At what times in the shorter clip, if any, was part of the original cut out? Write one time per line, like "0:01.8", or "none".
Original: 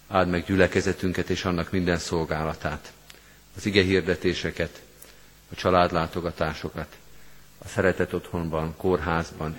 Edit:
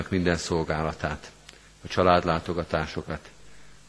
0:01.7